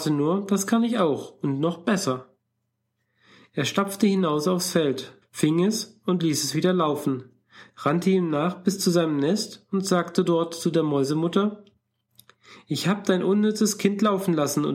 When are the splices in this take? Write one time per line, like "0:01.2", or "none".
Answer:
0:05.2